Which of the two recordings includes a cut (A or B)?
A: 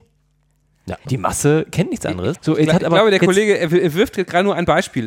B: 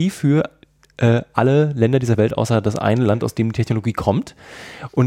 A